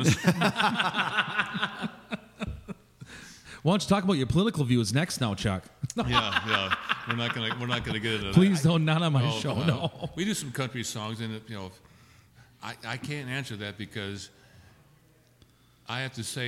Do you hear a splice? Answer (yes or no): no